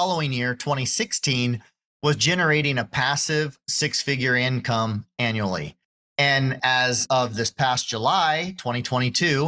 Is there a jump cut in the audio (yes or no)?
no